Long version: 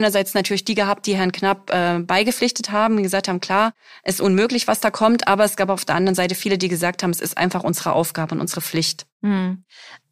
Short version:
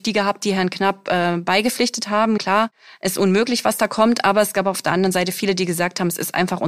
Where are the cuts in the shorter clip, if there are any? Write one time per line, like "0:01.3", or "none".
0:02.4